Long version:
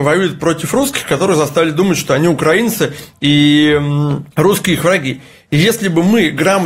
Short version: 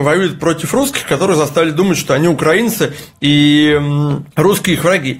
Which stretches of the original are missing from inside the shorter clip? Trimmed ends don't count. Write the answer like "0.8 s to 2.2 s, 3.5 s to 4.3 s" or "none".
none